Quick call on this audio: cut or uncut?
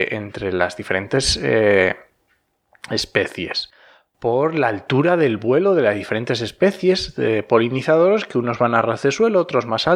uncut